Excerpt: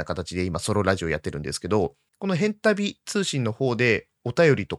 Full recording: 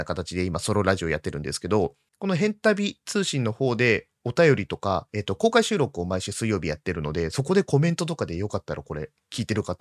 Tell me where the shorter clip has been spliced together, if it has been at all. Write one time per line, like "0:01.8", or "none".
none

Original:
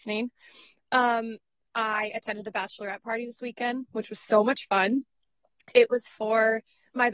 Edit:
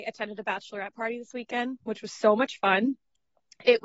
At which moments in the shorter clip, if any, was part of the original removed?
none

